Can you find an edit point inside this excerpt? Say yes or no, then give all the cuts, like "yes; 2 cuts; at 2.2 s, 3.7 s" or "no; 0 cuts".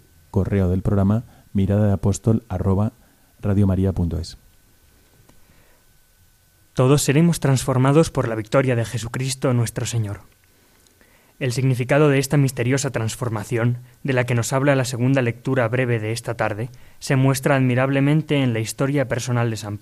no; 0 cuts